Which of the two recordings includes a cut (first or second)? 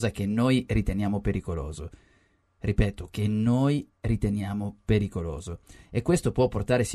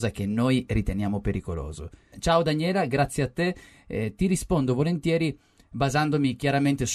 second